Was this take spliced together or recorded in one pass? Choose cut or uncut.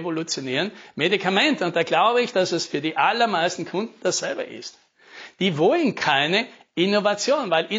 uncut